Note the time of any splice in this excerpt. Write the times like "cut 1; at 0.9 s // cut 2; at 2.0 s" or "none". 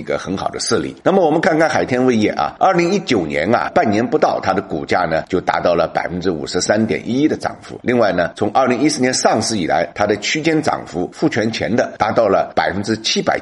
none